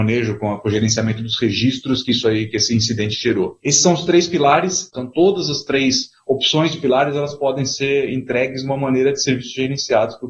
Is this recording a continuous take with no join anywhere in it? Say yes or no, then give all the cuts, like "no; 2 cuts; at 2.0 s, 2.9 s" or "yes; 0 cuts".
no; 1 cut; at 4.9 s